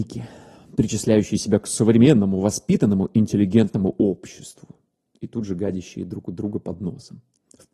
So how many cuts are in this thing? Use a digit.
0